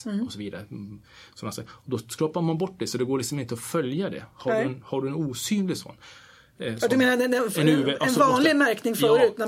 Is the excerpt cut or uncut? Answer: uncut